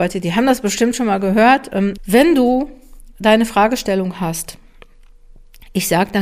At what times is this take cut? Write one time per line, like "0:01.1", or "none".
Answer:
0:02.0